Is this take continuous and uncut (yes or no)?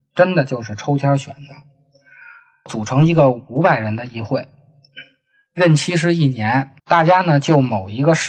no